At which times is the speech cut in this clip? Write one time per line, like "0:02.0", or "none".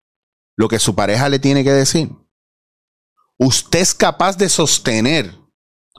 none

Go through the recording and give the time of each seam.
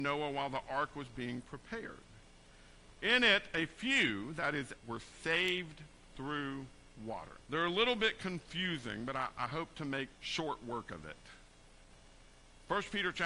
0:04.8
0:07.4
0:10.1

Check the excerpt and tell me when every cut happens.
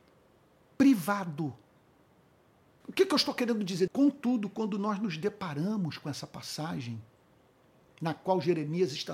0:02.8
0:03.9

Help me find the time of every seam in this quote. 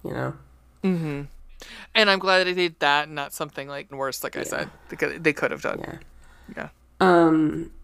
0:03.9

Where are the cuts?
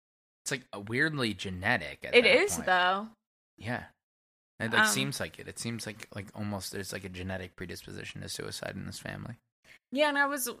0:03.4

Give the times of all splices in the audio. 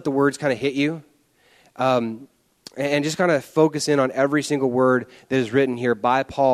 none

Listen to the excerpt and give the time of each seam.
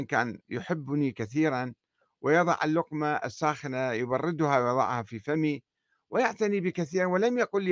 none

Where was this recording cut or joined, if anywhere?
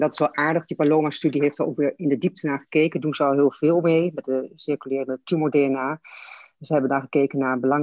none

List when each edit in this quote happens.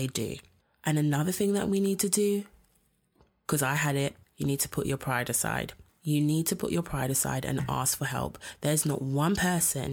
none

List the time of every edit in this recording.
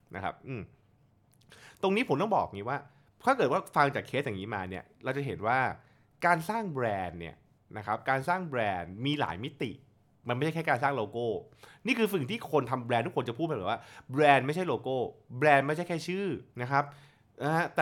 0:16.5

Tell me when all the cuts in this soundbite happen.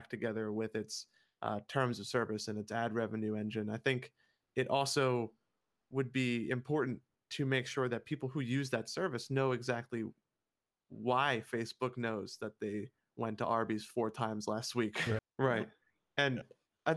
0:15.2

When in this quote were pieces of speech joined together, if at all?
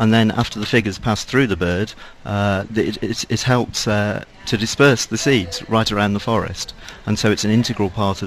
0:02.7

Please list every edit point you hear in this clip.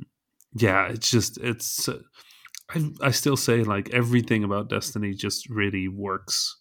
none

